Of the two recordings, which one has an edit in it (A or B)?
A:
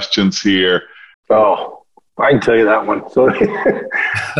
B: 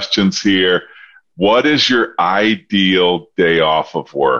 A